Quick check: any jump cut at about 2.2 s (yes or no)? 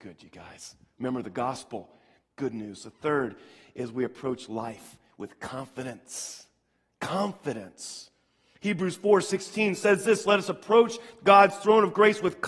yes